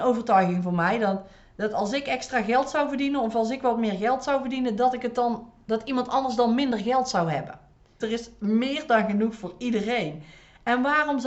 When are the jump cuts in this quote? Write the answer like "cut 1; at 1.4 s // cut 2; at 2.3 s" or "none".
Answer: cut 1; at 8.0 s